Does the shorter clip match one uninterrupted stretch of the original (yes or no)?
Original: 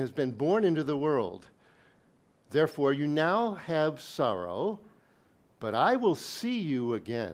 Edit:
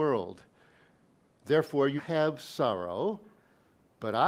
no